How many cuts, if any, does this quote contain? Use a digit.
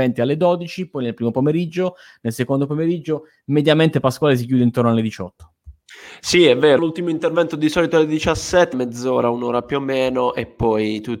2